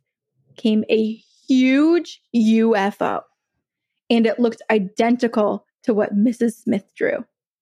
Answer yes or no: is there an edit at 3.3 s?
no